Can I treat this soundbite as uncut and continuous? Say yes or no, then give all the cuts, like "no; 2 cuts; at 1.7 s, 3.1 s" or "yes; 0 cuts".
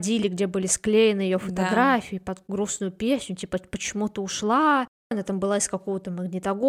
yes; 0 cuts